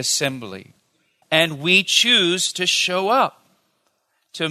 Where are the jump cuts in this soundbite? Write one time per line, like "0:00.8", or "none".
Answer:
0:01.2

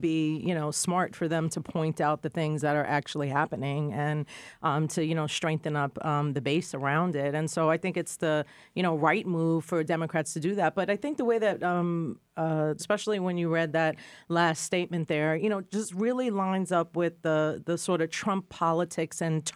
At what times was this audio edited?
0:12.8

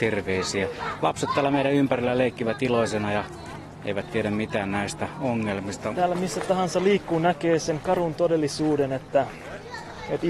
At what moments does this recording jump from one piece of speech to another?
0:05.9

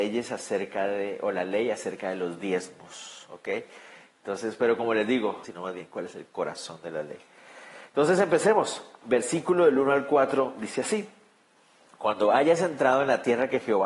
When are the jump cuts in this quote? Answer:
0:05.4

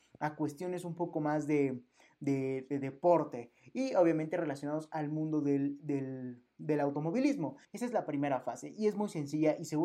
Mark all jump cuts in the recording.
0:07.6

